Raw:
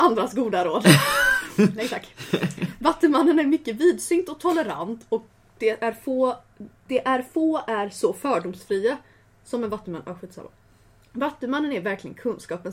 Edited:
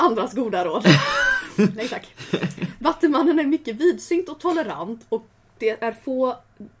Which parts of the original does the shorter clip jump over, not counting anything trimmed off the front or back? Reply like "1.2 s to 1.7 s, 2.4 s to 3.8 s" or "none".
none